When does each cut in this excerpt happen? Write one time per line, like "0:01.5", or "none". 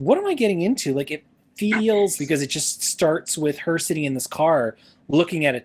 0:02.2